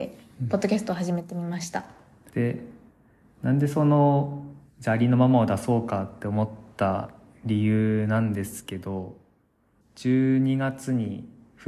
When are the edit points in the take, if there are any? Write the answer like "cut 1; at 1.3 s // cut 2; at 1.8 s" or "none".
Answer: cut 1; at 2.3 s // cut 2; at 9.8 s